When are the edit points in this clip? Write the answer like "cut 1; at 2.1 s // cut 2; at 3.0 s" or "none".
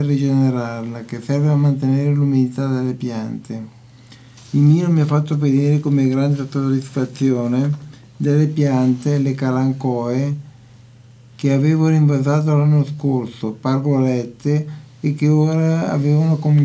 none

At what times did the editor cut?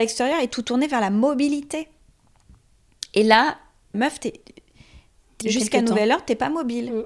cut 1; at 3.9 s // cut 2; at 5.4 s

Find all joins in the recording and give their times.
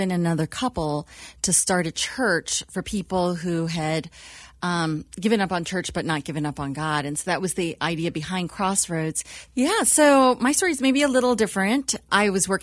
cut 1; at 9.5 s

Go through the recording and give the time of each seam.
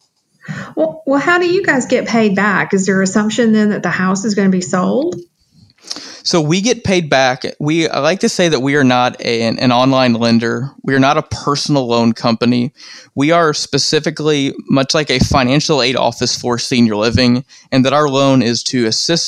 none

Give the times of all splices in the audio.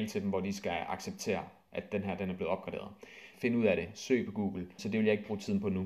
cut 1; at 3.3 s // cut 2; at 4.8 s

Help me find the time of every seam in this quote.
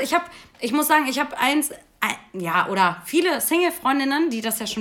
none

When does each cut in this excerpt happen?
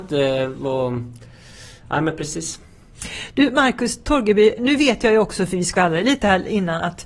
cut 1; at 4.6 s

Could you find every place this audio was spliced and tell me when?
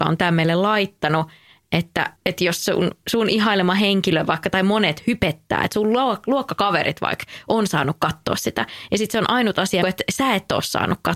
cut 1; at 2.2 s // cut 2; at 9.8 s

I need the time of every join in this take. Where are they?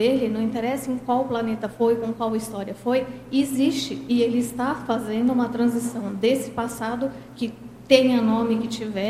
none

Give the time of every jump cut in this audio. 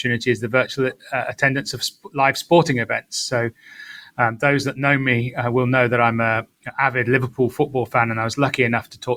none

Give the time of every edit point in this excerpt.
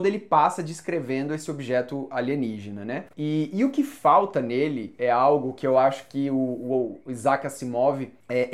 cut 1; at 3.1 s

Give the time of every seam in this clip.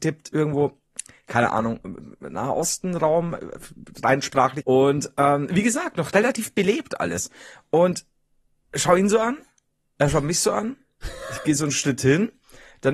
cut 1; at 4.6 s

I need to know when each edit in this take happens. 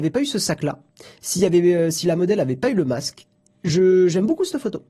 none

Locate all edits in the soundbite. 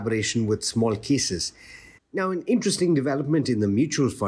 cut 1; at 2.0 s

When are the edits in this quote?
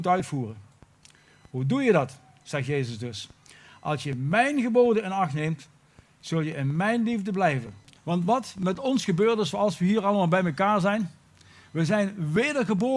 cut 1; at 8.0 s

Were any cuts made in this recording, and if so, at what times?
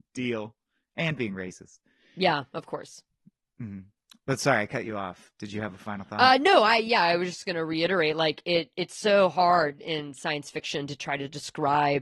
none

